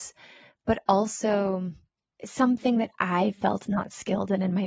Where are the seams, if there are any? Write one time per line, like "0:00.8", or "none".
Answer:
none